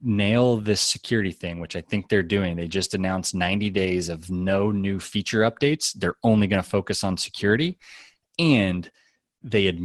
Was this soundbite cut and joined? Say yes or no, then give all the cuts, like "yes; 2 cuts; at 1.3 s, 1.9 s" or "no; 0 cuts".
no; 0 cuts